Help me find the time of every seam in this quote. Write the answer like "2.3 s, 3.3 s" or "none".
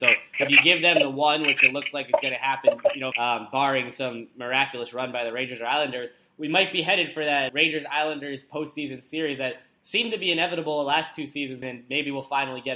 3.1 s, 7.5 s, 11.6 s